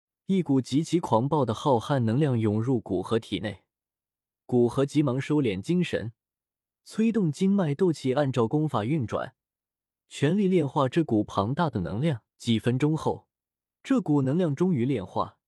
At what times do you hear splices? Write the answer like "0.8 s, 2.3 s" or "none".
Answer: 12.3 s